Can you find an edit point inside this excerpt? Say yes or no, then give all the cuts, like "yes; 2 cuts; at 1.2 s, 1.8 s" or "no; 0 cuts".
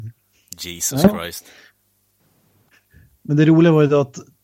no; 0 cuts